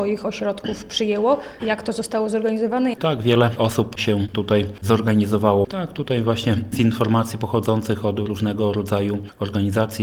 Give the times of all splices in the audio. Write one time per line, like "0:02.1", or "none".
0:02.9
0:05.6